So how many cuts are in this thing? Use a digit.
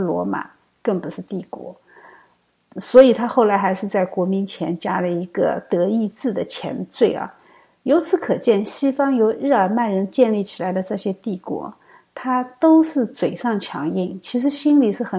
0